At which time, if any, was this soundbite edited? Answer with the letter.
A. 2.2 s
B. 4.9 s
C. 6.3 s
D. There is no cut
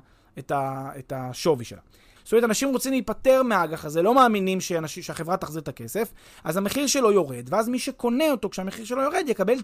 A